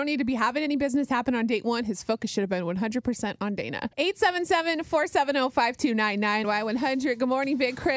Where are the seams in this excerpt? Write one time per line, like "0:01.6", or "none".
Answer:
0:03.9
0:06.4